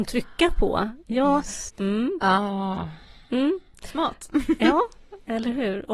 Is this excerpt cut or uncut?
cut